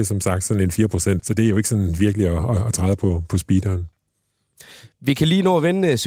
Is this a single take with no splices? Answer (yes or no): no